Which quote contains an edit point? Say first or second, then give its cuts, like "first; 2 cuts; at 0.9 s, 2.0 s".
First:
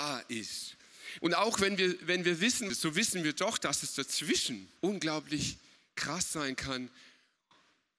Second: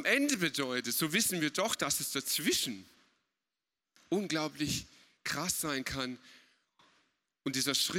first; 3 cuts; at 1.2 s, 2.7 s, 4.8 s